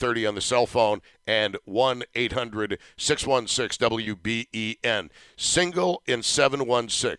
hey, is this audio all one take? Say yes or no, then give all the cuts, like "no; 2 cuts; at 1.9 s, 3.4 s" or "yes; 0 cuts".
yes; 0 cuts